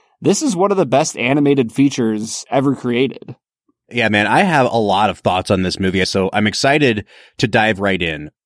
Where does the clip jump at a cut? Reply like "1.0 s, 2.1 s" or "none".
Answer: 6.0 s